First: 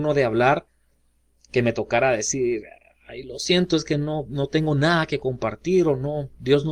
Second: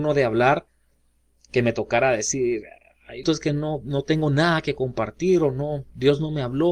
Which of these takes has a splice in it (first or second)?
second